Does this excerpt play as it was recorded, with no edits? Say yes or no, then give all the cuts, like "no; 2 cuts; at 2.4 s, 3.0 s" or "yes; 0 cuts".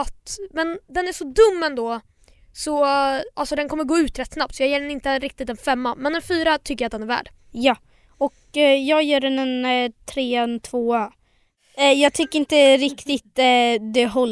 yes; 0 cuts